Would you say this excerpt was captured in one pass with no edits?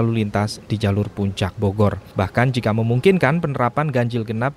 yes; 0 cuts

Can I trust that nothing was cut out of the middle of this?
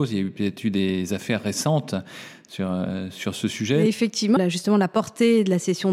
no; 1 cut; at 4.4 s

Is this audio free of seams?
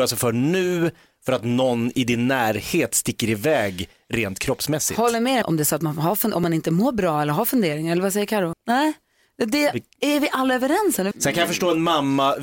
no; 3 cuts; at 5.4 s, 8.5 s, 11.1 s

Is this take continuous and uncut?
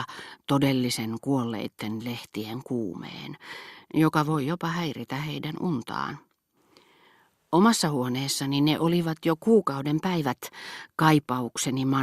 yes; 0 cuts

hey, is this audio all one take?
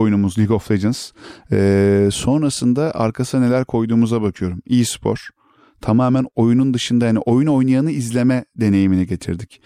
yes; 0 cuts

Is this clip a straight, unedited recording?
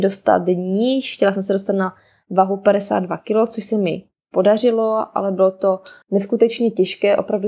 no; 1 cut; at 6.0 s

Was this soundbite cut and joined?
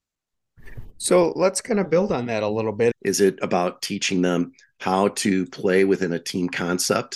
yes; 1 cut; at 2.9 s

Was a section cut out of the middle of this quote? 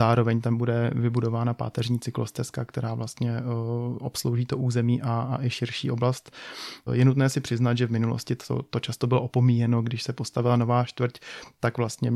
yes; 1 cut; at 6.9 s

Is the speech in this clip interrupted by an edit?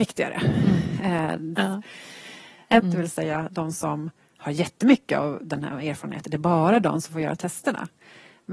yes; 2 cuts; at 1.6 s, 2.8 s

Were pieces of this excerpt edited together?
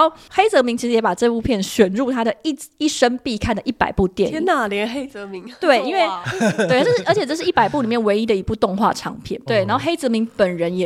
yes; 1 cut; at 9.5 s

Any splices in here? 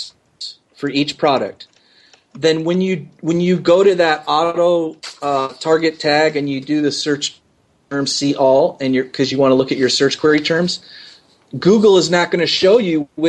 no; 0 cuts

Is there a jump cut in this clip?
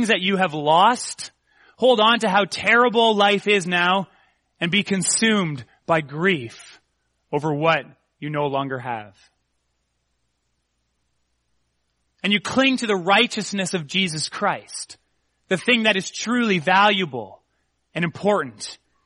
yes; 1 cut; at 12.1 s

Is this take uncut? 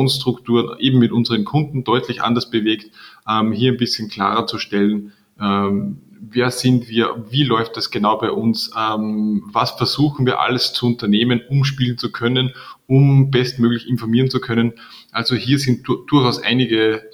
yes; 0 cuts

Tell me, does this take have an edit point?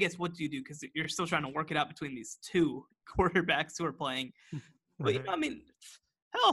no; 0 cuts

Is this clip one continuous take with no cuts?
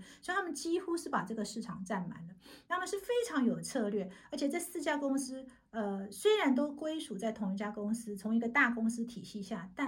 yes; 0 cuts

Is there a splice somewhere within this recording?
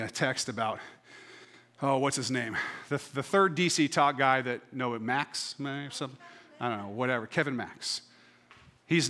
no; 0 cuts

